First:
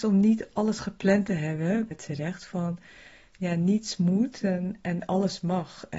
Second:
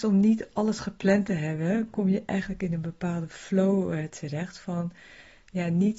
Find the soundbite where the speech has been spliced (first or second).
first